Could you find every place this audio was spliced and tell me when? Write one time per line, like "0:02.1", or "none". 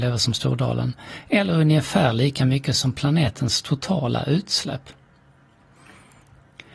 none